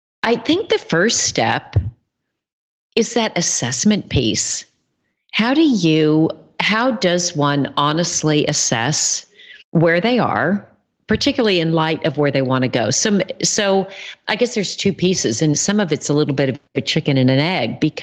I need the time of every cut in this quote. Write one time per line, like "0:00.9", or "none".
0:09.6
0:15.5